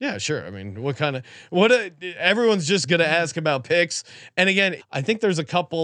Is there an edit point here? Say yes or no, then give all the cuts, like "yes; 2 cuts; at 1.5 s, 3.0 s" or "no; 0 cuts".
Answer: yes; 1 cut; at 4.8 s